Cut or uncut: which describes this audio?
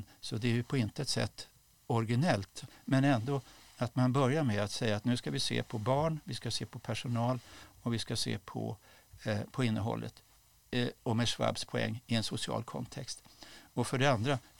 uncut